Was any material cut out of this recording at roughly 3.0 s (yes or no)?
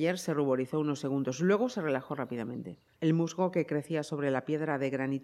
yes